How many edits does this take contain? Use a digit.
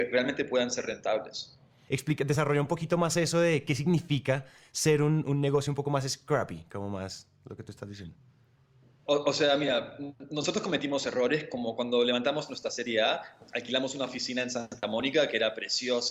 1